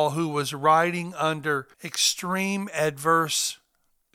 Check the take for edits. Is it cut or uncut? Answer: cut